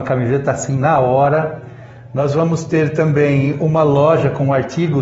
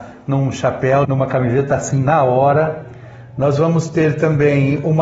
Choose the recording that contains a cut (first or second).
second